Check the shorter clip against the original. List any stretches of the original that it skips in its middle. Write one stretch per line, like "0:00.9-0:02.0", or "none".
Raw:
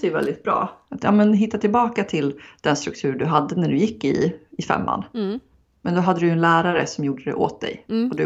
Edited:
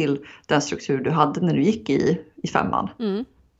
none